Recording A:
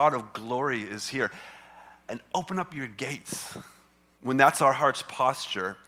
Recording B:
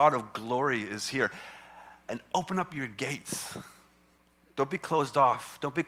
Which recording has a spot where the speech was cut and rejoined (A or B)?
A